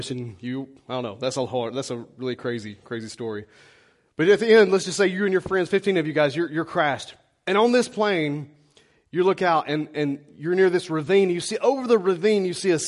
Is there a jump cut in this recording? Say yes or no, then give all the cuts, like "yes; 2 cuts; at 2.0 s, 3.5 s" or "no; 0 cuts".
no; 0 cuts